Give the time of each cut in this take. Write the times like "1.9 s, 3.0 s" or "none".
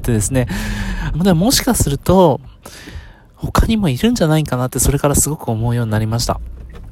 1.1 s